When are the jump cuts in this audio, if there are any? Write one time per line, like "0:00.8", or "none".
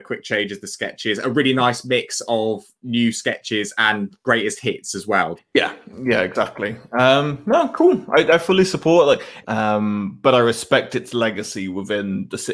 0:05.4
0:09.4